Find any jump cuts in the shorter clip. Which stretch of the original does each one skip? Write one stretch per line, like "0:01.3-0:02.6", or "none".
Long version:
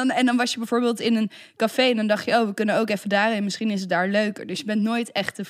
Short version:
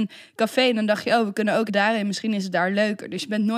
0:02.9-0:03.0